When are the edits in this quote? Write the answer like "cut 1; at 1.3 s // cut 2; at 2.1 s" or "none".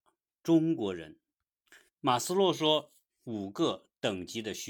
cut 1; at 1.9 s // cut 2; at 3.1 s